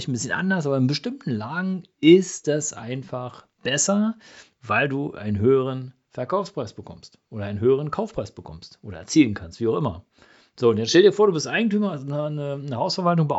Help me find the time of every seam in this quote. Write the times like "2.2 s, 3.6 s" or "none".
none